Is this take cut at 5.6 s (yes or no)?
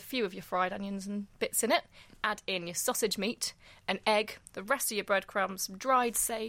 no